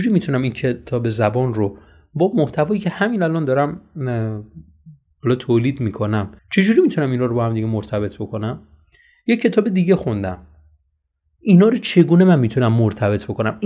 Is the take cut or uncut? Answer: cut